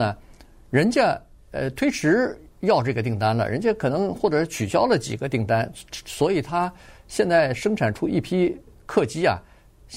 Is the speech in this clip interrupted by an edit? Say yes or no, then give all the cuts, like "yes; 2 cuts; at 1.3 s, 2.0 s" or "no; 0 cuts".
no; 0 cuts